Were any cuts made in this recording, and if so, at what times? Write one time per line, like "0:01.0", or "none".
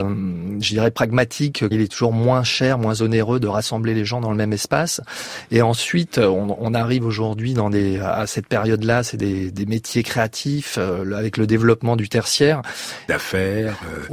0:01.7
0:13.1